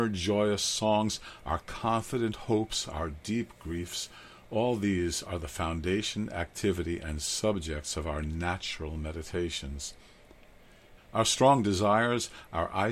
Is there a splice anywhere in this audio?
yes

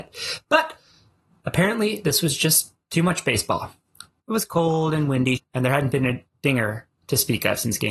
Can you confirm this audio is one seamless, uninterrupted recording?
no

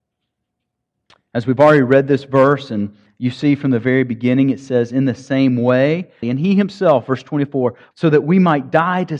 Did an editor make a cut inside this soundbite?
yes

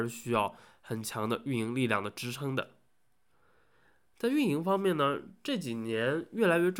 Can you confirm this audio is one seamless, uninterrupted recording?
yes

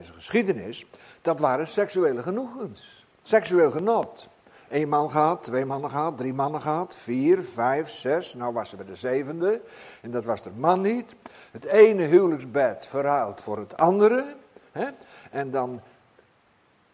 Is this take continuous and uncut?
yes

